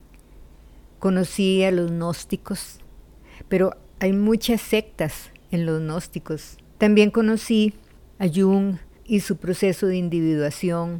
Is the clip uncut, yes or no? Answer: no